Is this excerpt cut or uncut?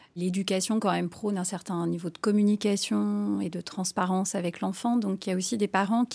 uncut